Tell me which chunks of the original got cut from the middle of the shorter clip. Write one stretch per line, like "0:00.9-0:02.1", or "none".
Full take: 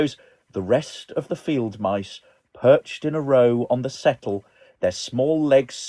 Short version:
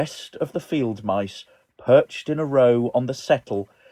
none

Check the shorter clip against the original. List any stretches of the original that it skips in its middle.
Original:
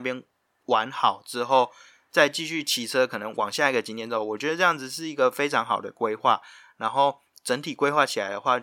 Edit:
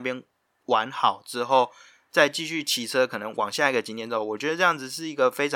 none

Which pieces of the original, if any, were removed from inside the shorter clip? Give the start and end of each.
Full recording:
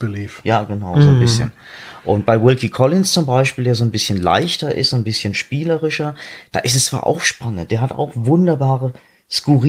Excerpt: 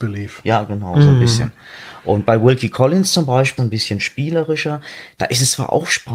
0:03.6-0:04.9

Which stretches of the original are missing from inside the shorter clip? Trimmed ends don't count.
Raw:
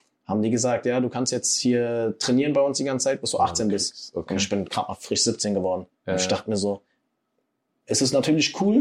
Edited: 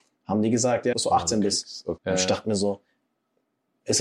0:00.9-0:03.2
0:04.3-0:06.0

